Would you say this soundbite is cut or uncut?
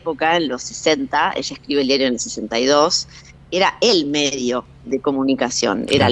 cut